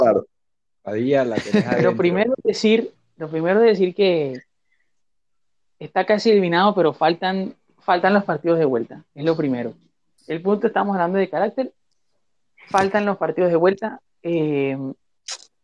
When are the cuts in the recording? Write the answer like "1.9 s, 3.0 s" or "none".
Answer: 10.2 s